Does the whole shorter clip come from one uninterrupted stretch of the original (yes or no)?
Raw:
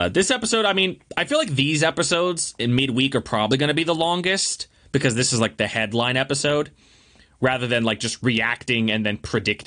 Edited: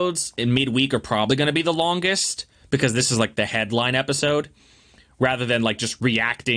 yes